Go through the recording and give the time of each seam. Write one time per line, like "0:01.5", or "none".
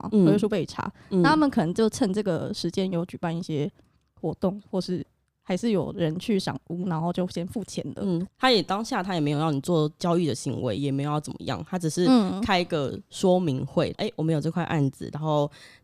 0:08.3
0:10.8
0:13.9